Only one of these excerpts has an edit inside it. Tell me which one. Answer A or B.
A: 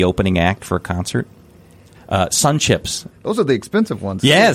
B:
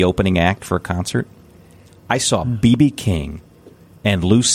A